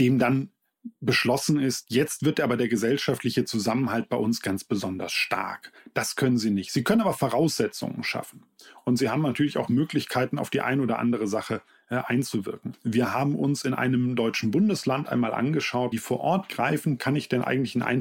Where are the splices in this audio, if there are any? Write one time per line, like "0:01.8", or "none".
0:12.7
0:15.9